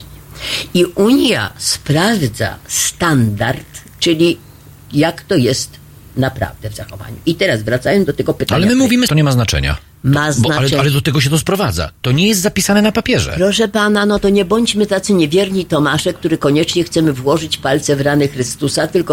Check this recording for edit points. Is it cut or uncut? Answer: cut